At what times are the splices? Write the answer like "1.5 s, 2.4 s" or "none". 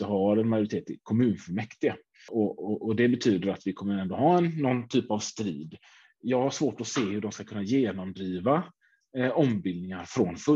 none